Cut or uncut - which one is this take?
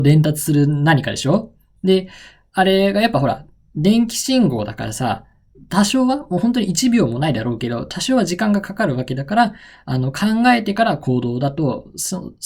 uncut